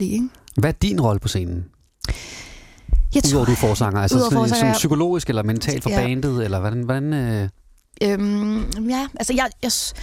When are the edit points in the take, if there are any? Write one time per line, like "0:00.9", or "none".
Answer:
none